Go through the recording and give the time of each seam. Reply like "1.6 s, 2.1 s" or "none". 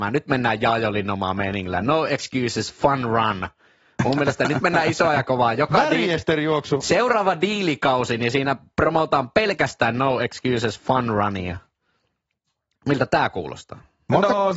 none

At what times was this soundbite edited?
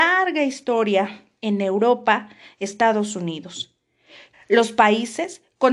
4.3 s

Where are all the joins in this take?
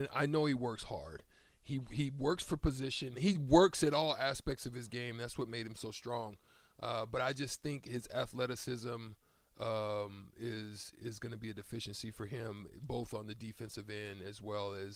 3.1 s

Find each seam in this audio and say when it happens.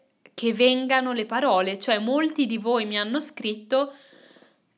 none

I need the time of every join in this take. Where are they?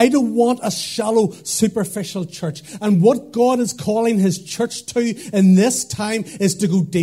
2.8 s

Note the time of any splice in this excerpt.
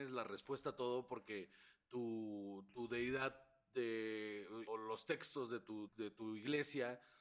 4.7 s, 5.9 s

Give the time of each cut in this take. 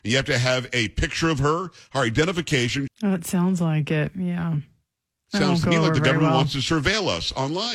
2.9 s

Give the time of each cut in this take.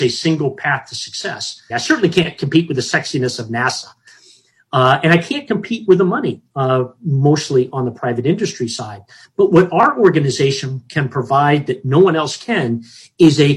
1.7 s

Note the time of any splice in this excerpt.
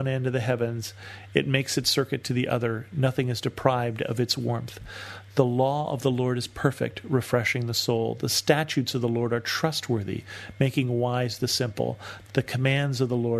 12.3 s

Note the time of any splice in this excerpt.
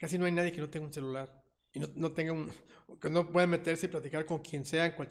none

